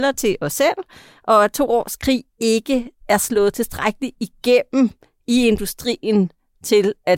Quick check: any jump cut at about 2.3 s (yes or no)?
yes